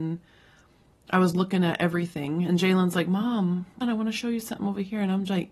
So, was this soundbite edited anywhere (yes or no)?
yes